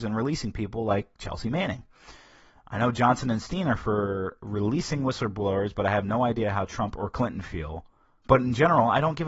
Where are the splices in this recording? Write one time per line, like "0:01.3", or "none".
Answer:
0:08.2